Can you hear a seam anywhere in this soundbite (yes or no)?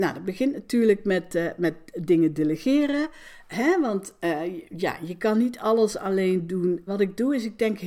yes